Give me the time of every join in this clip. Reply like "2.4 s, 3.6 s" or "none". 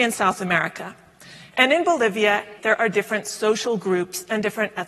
2.6 s